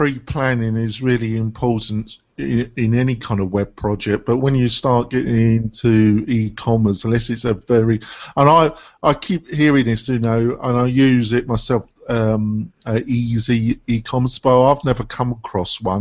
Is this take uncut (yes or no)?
yes